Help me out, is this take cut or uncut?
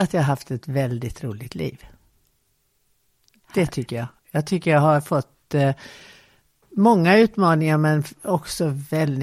uncut